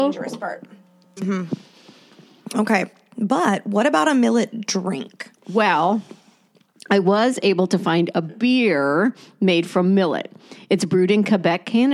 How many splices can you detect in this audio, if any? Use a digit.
1